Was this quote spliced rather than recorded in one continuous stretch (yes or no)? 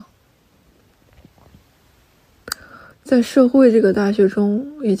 yes